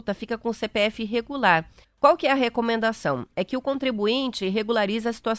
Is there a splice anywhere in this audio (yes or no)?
yes